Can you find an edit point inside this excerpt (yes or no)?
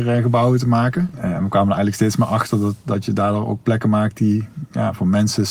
no